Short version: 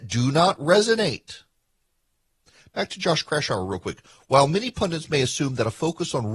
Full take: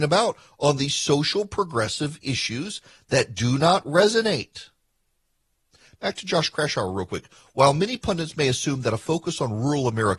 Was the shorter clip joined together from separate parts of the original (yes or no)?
no